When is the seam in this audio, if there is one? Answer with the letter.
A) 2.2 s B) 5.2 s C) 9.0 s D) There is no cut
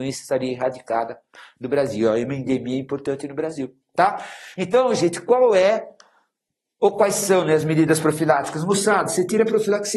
D